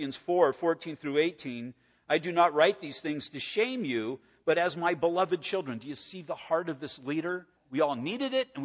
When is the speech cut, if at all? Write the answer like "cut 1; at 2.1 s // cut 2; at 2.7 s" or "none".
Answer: cut 1; at 7.6 s